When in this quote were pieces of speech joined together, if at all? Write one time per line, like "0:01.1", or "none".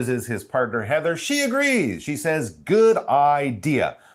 none